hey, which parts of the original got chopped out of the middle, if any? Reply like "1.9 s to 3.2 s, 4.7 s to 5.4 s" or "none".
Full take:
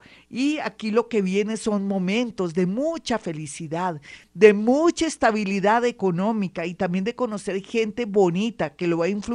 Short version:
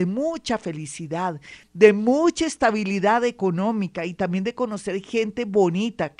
none